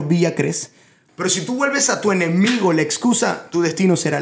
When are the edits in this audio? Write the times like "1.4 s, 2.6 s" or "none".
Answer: 1.1 s